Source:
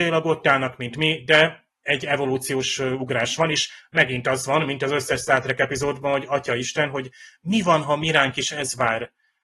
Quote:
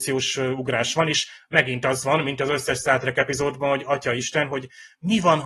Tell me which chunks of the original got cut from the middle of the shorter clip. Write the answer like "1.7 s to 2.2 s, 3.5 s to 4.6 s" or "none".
none